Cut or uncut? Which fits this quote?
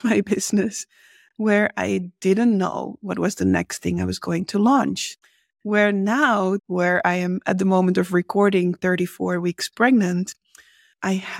cut